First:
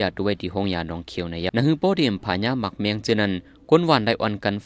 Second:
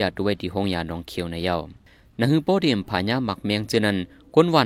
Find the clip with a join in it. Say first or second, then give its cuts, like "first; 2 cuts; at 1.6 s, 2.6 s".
first; 1 cut; at 1.5 s